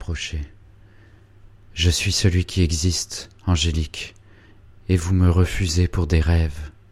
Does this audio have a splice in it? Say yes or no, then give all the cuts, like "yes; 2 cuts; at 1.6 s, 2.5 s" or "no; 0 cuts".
no; 0 cuts